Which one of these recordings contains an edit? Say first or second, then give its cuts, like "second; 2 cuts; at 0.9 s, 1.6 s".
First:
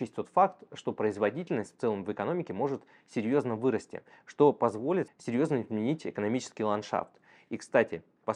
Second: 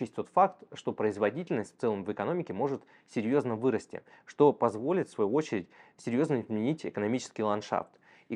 first; 1 cut; at 5.1 s